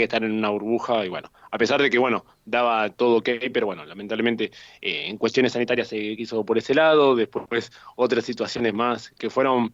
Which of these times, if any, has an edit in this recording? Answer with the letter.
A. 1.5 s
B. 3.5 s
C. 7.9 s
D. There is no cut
D